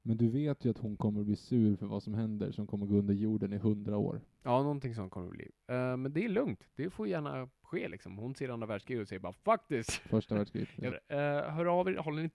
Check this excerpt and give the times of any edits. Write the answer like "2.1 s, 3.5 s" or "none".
10.9 s